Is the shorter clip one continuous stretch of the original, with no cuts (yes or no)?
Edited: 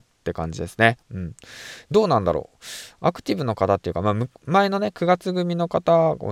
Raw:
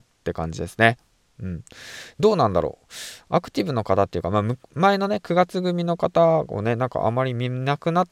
no